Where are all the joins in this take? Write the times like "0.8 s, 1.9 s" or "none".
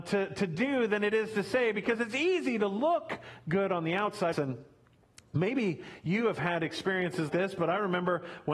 4.3 s, 7.3 s